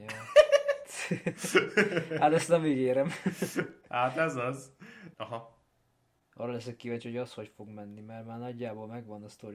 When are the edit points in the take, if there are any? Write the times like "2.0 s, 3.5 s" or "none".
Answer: 5.1 s